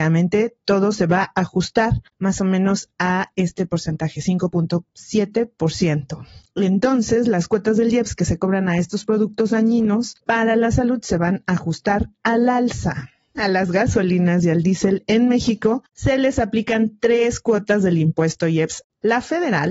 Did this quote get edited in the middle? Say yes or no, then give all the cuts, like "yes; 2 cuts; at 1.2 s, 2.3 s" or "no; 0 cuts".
no; 0 cuts